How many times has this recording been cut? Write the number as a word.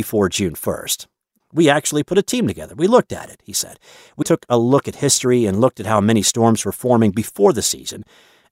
two